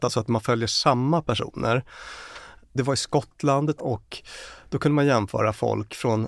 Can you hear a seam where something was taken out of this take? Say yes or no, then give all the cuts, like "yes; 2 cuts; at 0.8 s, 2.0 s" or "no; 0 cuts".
yes; 1 cut; at 3.8 s